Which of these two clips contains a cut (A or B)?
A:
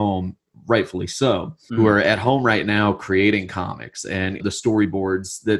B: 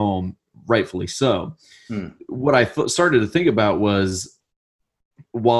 A